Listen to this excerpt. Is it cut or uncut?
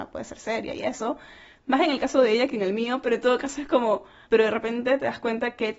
cut